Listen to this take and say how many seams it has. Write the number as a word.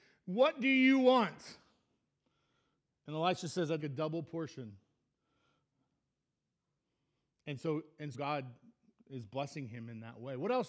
two